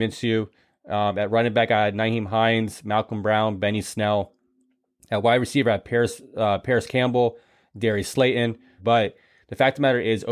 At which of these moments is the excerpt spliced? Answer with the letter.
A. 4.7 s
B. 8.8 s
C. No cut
B